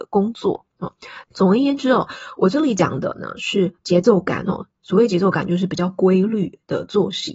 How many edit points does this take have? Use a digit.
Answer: 1